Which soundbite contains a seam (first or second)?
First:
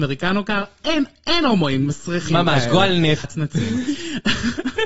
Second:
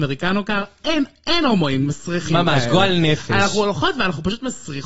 first